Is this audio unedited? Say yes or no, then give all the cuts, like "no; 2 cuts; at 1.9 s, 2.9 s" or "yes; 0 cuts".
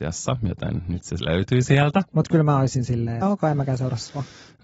no; 2 cuts; at 2.1 s, 3.2 s